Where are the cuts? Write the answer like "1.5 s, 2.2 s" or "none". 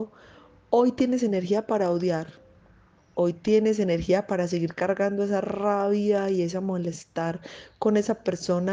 3.0 s